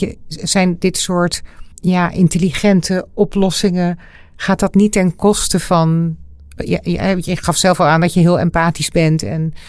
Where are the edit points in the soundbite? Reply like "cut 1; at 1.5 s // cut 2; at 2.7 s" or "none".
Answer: cut 1; at 1.7 s